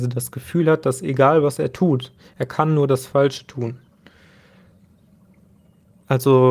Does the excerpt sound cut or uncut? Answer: uncut